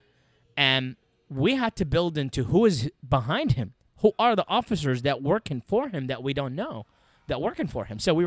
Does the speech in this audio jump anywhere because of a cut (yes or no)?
no